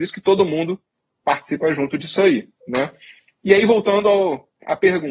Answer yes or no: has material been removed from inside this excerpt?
no